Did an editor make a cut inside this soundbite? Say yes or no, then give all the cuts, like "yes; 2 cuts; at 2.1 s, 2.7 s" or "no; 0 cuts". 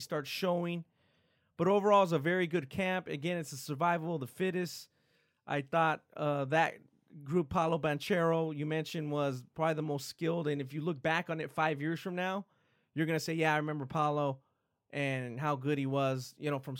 no; 0 cuts